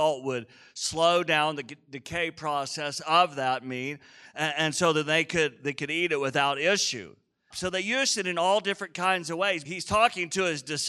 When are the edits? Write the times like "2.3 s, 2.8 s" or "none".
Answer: 7.5 s, 9.6 s